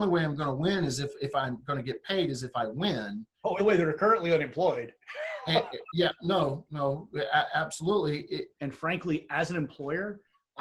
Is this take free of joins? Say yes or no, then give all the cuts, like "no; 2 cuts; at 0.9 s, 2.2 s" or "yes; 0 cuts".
no; 2 cuts; at 3.6 s, 8.5 s